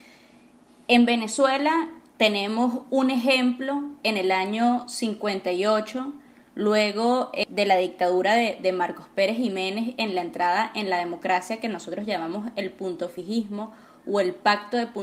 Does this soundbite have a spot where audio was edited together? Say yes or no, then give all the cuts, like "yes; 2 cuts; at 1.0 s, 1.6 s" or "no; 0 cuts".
no; 0 cuts